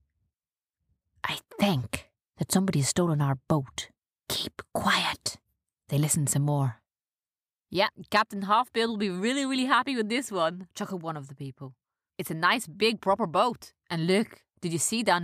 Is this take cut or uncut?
cut